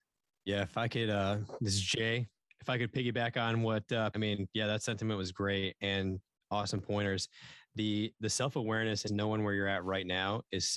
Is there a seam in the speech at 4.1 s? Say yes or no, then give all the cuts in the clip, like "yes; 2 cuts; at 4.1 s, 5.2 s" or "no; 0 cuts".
yes; 2 cuts; at 4.1 s, 9.1 s